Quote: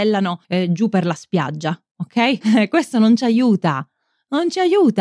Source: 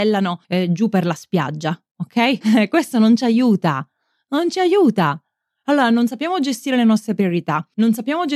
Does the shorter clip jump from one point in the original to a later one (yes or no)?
no